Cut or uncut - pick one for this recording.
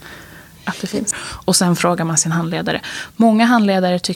cut